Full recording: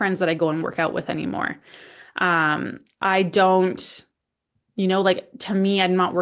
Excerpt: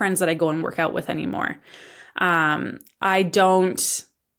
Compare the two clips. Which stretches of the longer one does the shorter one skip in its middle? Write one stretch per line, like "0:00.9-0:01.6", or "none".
none